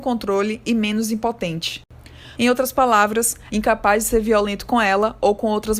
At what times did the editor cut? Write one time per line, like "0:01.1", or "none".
0:02.3
0:03.5